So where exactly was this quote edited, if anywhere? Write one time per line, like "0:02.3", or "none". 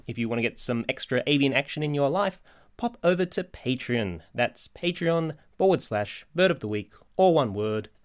none